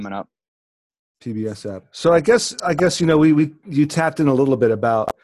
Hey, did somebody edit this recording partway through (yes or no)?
yes